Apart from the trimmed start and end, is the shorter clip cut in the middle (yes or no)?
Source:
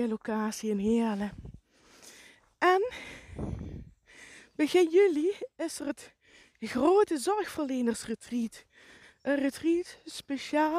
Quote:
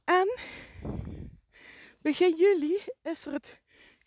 no